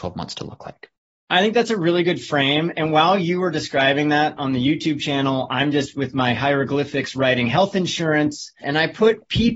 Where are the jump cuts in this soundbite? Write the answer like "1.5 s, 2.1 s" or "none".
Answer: 8.6 s